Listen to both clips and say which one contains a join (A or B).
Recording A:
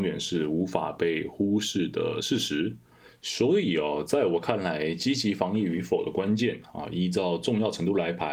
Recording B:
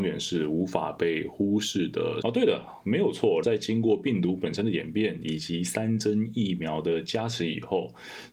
B